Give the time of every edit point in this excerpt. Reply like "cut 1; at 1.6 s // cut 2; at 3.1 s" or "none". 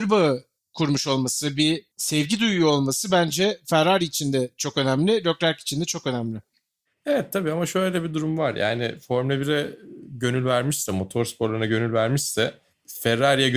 cut 1; at 1.9 s